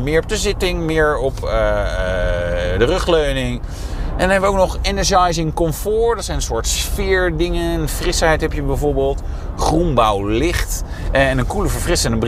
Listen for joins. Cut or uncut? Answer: uncut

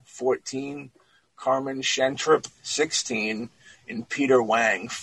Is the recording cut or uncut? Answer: uncut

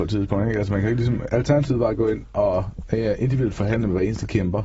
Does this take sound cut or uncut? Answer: cut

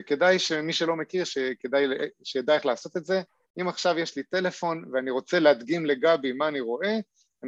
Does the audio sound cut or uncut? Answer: cut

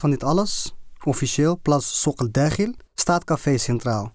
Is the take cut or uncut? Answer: cut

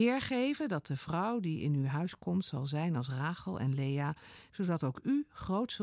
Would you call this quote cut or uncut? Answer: cut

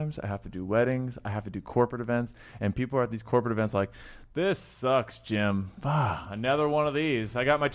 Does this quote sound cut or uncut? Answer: uncut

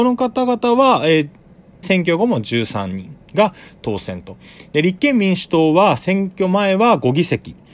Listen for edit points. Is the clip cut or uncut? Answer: cut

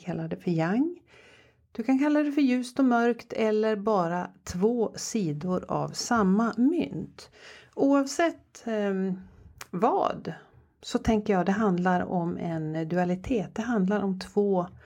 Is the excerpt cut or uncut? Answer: uncut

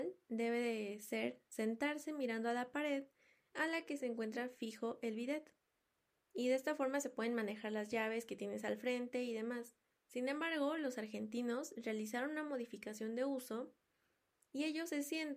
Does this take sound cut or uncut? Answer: uncut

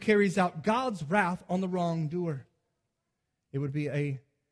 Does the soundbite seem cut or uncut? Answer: uncut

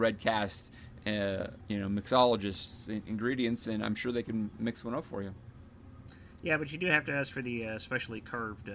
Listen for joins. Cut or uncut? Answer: cut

